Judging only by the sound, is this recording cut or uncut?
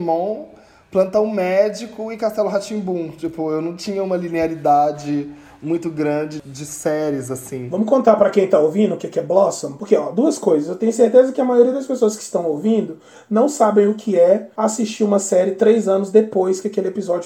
uncut